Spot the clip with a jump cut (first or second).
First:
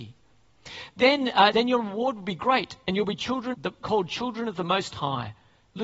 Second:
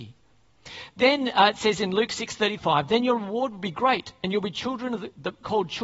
first